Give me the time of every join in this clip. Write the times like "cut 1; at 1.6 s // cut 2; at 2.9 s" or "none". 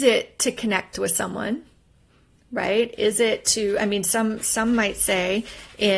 none